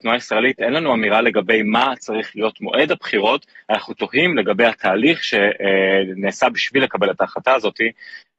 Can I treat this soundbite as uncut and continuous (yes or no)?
yes